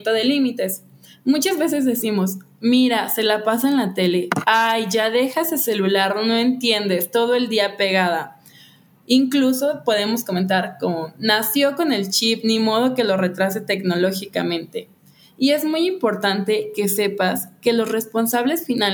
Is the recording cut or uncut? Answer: uncut